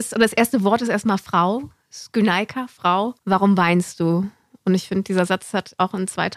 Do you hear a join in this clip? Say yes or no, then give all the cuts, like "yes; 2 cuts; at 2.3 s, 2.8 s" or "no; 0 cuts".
yes; 1 cut; at 3.2 s